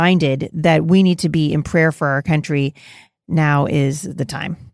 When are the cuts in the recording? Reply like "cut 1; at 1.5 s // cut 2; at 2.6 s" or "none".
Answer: none